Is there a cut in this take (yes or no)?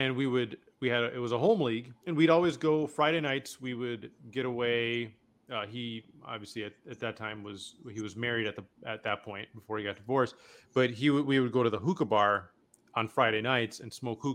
no